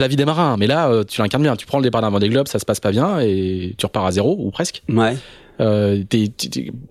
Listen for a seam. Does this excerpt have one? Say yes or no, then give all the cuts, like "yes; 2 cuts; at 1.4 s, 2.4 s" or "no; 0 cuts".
no; 0 cuts